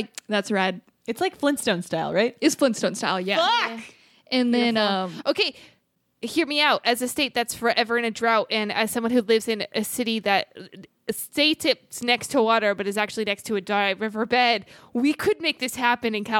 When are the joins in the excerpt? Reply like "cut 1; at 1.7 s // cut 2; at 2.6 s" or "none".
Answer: none